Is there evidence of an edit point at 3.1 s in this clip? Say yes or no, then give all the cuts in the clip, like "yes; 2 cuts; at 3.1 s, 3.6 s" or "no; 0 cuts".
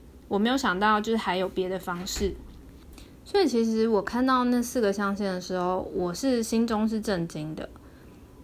no; 0 cuts